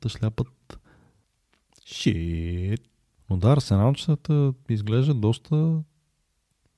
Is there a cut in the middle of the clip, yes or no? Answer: no